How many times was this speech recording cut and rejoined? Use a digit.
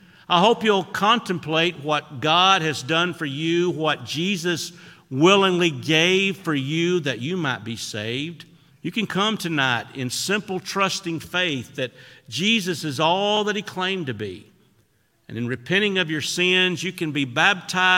1